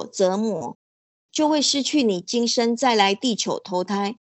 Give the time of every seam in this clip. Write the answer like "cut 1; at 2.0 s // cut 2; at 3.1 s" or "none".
none